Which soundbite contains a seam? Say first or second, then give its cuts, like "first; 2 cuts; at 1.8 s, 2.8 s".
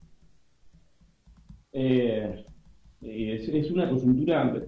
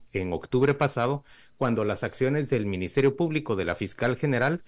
first; 1 cut; at 1.6 s